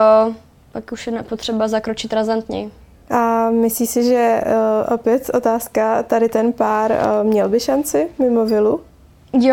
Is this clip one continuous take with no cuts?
yes; 0 cuts

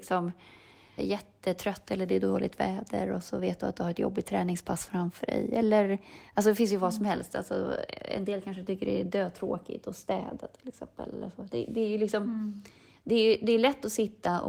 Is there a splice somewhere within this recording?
yes; 1 cut; at 1.0 s

